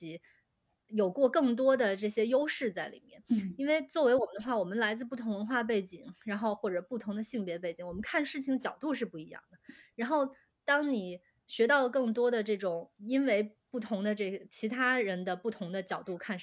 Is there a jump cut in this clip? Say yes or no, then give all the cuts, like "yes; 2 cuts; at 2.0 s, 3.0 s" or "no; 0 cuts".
no; 0 cuts